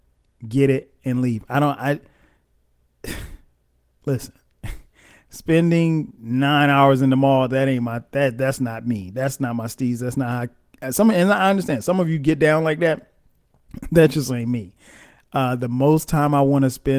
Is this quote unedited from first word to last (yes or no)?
yes